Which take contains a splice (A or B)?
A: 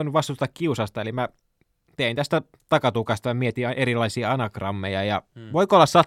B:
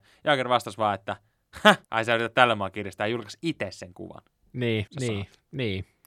B